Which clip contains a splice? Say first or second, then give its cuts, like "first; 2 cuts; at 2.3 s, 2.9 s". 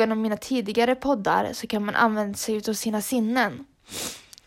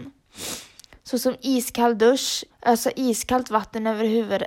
second; 1 cut; at 2.5 s